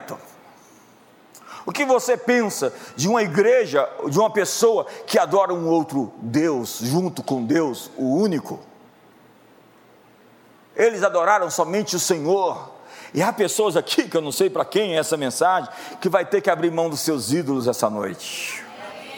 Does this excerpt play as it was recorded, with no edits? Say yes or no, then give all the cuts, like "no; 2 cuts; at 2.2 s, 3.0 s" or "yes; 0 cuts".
yes; 0 cuts